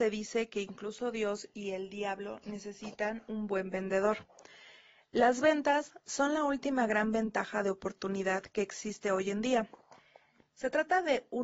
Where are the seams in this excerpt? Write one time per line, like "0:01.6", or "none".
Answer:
none